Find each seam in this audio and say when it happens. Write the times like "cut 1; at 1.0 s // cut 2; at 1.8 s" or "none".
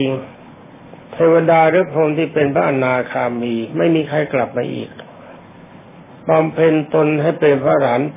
cut 1; at 1.0 s